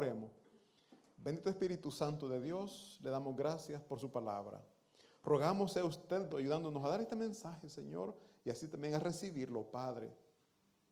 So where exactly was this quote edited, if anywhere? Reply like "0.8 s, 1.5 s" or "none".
6.3 s